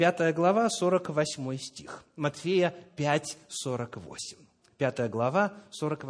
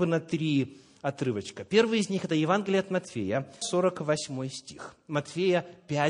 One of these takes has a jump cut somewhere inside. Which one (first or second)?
second